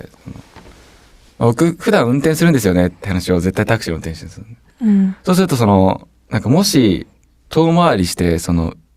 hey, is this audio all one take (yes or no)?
yes